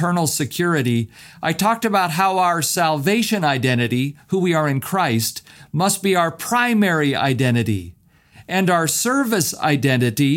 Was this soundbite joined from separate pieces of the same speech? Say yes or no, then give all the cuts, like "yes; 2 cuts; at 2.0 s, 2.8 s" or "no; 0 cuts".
no; 0 cuts